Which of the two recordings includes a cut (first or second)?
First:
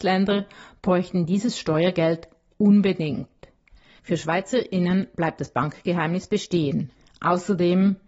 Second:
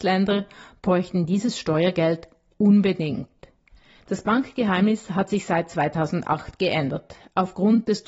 first